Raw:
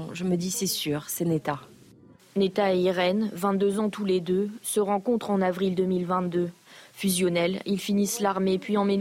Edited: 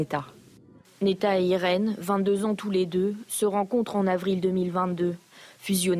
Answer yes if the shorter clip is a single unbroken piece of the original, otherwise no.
yes